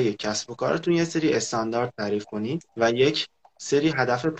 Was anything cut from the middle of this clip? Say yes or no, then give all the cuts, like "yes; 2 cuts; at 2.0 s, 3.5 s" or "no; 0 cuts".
yes; 1 cut; at 2.7 s